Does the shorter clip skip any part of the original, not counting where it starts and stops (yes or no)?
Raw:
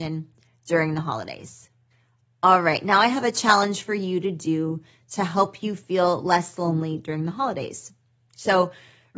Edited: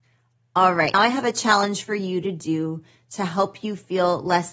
yes